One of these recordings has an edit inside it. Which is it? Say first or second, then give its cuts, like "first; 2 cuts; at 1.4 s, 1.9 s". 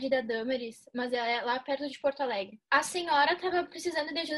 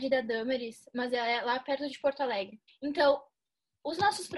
second; 1 cut; at 2.7 s